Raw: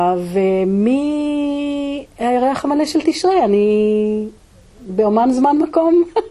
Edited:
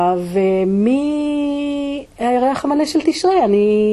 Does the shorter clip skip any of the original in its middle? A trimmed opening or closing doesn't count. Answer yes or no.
no